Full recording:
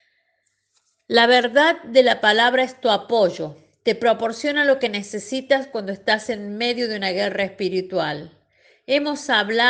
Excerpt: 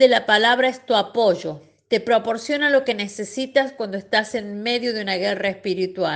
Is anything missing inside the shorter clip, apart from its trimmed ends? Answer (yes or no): no